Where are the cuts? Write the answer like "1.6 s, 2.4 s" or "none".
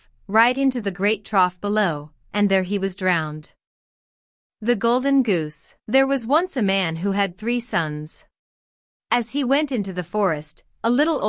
5.8 s, 9.0 s